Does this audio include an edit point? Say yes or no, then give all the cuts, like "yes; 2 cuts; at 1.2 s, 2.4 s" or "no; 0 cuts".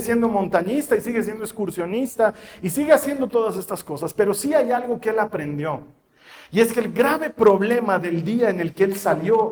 no; 0 cuts